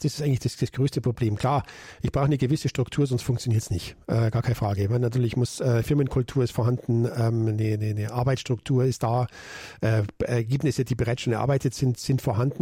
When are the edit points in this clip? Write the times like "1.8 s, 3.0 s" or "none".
none